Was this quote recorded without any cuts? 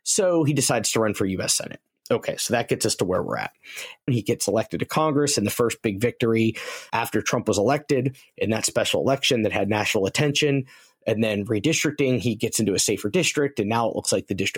no; 2 cuts; at 4.1 s, 6.9 s

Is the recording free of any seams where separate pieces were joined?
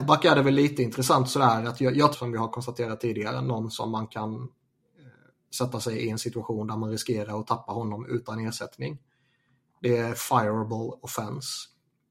no; 1 cut; at 2.1 s

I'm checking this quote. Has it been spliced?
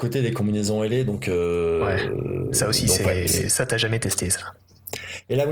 no; 0 cuts

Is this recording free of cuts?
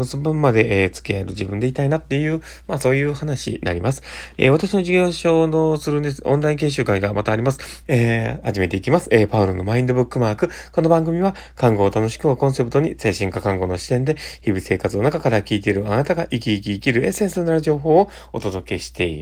no; 2 cuts; at 4.4 s, 7.8 s

